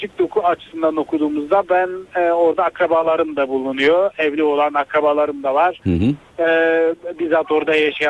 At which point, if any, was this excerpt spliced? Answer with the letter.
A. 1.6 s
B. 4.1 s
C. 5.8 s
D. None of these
D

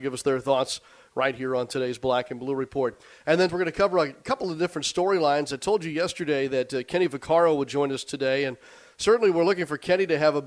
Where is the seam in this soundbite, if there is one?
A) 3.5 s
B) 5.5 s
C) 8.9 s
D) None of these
A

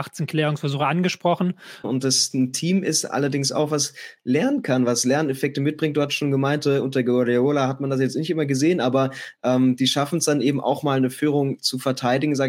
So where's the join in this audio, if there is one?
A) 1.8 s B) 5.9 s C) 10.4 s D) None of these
A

